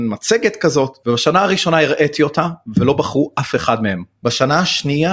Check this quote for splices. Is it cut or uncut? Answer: uncut